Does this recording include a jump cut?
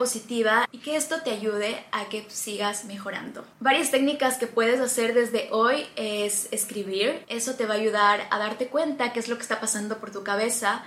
yes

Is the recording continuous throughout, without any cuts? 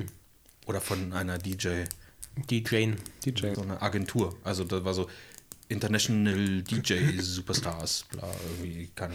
no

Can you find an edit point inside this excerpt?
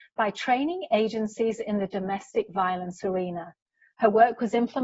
no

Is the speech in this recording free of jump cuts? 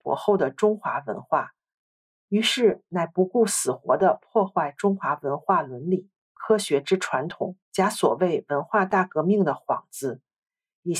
no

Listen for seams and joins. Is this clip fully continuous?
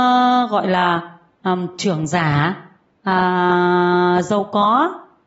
yes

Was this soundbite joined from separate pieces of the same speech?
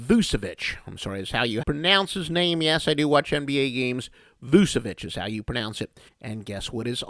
yes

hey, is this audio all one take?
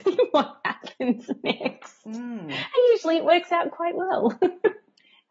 yes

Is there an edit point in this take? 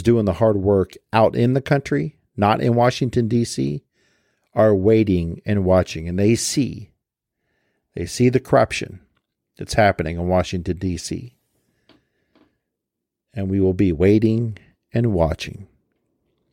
no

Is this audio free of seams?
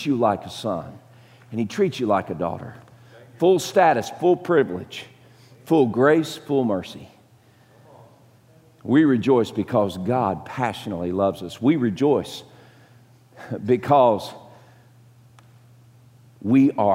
yes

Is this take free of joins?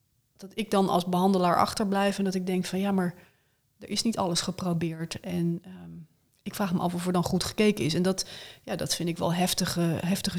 yes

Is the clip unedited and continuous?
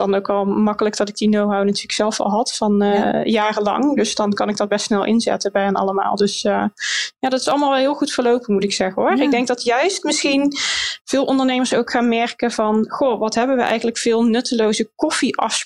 yes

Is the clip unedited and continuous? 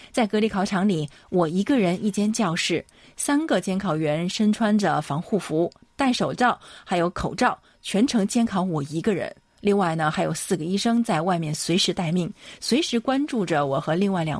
yes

